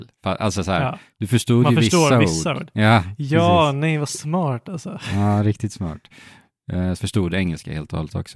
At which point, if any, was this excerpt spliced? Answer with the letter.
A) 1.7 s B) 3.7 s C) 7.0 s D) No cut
C